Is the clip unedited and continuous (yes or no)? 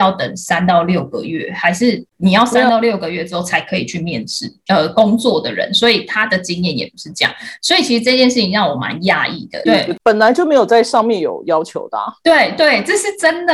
no